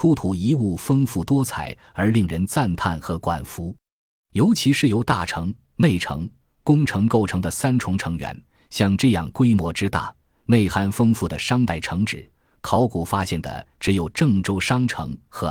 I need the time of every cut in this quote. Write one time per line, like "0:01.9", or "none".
none